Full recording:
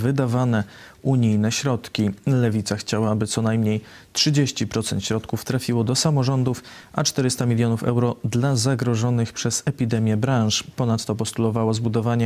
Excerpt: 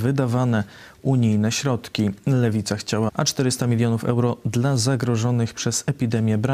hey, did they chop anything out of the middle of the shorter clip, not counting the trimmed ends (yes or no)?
yes